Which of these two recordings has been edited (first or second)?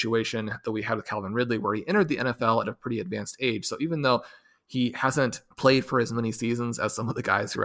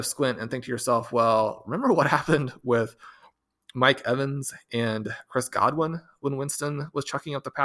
first